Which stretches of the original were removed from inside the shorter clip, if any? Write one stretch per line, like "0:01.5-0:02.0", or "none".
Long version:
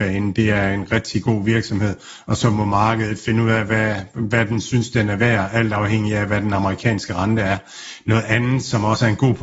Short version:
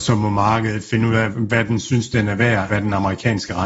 0:03.7-0:04.1
0:05.5-0:06.3